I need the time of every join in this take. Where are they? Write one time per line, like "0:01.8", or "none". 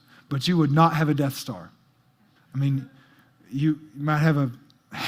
0:02.4